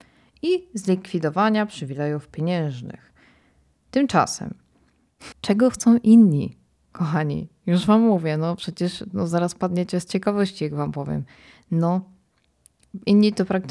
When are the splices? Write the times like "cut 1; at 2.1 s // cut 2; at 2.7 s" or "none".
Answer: cut 1; at 5.3 s